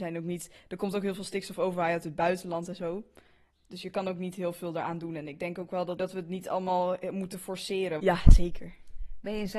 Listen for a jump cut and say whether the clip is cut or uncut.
cut